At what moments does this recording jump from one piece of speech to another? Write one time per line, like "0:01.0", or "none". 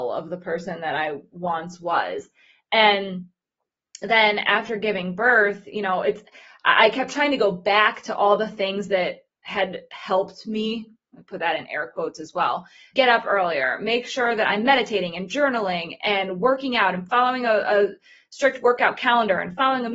0:12.9